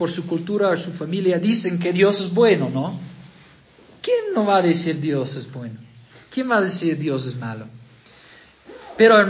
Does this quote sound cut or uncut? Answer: uncut